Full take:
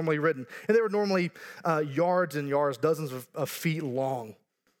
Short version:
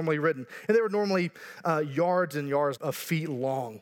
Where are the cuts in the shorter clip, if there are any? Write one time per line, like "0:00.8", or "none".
0:02.8